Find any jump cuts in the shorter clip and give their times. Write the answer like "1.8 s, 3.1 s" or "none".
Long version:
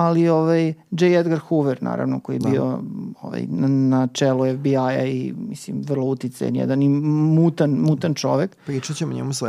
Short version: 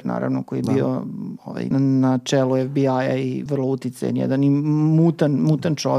1.7 s, 3.5 s